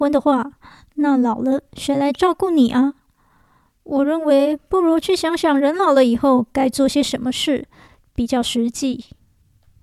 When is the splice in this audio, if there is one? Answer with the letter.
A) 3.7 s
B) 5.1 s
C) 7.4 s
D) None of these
D